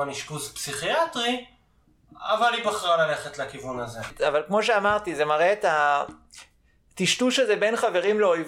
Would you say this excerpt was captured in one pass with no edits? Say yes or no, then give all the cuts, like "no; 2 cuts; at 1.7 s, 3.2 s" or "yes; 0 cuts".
yes; 0 cuts